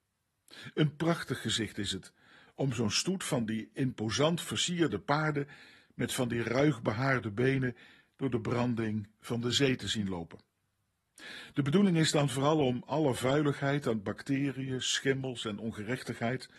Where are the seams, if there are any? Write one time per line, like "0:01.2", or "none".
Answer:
none